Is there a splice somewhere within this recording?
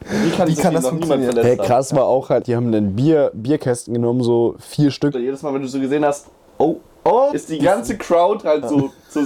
yes; 3 cuts; at 2.4 s, 5.1 s, 7.3 s

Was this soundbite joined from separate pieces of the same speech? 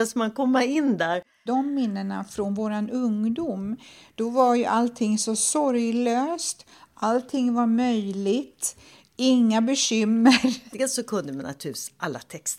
yes; 2 cuts; at 1.5 s, 10.7 s

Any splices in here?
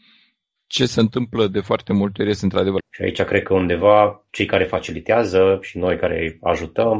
yes; 2 cuts; at 2.8 s, 4.3 s

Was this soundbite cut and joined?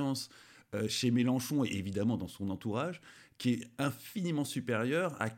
no; 0 cuts

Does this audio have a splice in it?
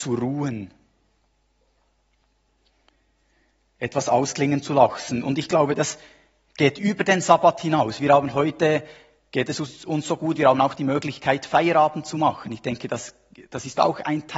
no; 0 cuts

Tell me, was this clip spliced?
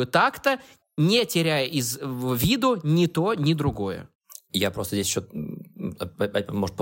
no; 0 cuts

